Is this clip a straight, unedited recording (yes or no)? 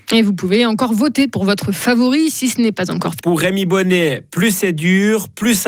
no